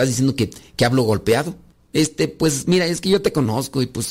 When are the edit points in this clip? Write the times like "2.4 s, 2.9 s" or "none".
1.7 s